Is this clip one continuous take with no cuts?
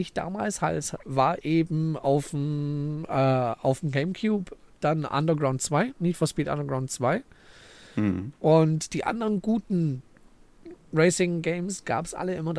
no; 1 cut; at 1.0 s

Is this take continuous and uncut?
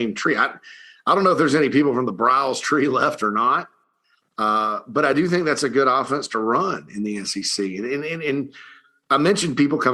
yes; 0 cuts

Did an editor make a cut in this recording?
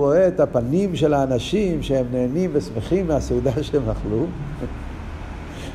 no; 0 cuts

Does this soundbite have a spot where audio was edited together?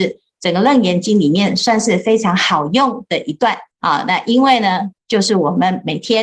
yes; 2 cuts; at 3.7 s, 4.9 s

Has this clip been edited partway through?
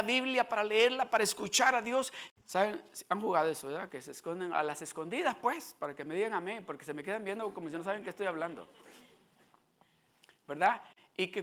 yes; 1 cut; at 2.3 s

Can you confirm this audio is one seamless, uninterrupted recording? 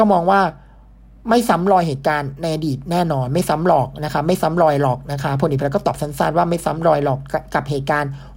yes; 0 cuts

